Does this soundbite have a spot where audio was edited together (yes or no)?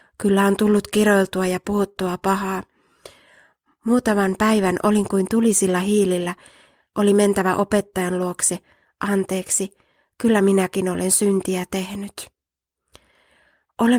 no